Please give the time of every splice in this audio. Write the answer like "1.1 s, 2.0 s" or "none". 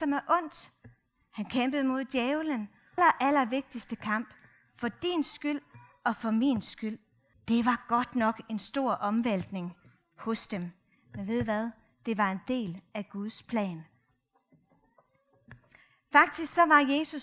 3.0 s, 7.3 s